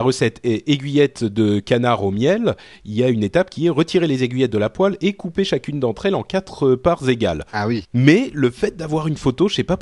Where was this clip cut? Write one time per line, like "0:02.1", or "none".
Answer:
0:07.8